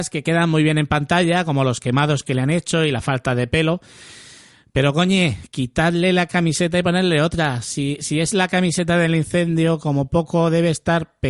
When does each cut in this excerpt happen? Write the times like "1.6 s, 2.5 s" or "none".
none